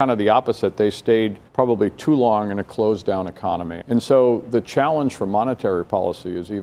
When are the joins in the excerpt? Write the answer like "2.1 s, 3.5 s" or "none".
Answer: 1.5 s, 3.8 s